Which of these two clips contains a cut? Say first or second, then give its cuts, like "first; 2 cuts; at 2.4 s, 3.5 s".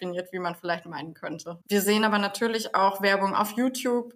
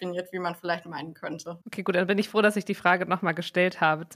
first; 1 cut; at 1.6 s